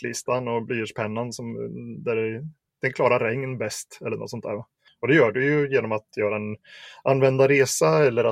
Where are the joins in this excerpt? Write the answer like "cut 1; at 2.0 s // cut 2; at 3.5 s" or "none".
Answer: cut 1; at 4.9 s